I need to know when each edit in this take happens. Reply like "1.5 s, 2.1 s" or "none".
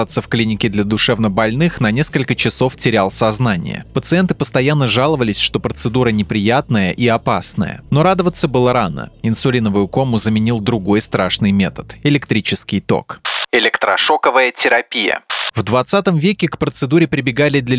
7.8 s